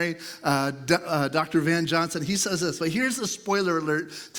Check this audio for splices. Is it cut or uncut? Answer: cut